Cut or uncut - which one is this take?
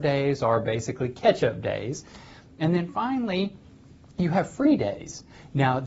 uncut